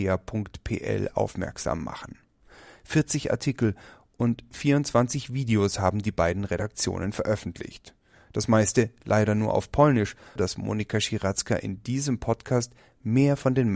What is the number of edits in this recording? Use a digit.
1